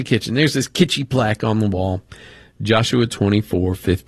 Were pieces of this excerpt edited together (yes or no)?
no